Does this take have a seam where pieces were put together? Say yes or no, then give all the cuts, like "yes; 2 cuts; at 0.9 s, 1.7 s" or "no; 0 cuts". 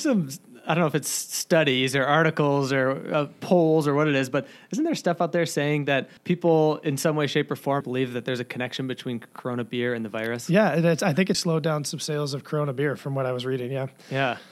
yes; 3 cuts; at 6.2 s, 7.8 s, 11.3 s